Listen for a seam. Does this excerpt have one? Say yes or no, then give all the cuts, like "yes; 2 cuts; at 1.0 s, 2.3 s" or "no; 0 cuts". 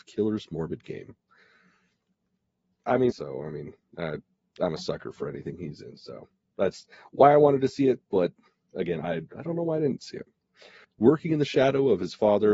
yes; 2 cuts; at 3.1 s, 10.8 s